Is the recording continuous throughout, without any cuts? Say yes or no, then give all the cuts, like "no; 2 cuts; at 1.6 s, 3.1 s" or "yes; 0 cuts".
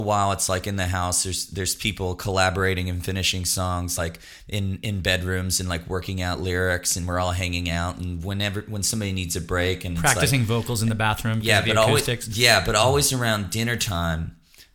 yes; 0 cuts